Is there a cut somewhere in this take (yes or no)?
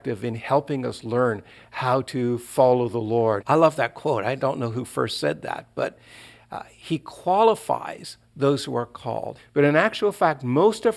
yes